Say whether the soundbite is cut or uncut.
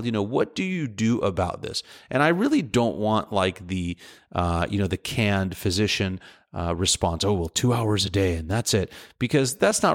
uncut